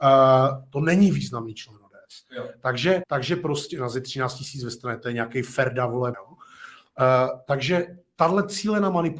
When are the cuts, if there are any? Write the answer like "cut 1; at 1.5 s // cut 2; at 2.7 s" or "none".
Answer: cut 1; at 3.0 s // cut 2; at 6.1 s